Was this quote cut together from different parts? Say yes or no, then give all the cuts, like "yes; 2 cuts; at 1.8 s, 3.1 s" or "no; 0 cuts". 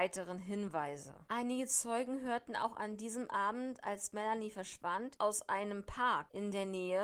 yes; 2 cuts; at 1.3 s, 5.2 s